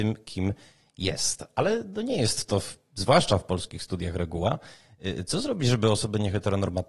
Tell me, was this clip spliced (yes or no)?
no